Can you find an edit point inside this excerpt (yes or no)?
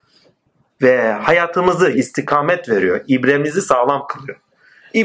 yes